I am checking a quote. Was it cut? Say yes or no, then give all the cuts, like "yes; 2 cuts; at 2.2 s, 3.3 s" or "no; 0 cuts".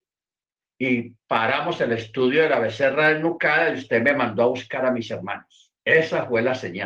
yes; 1 cut; at 5.8 s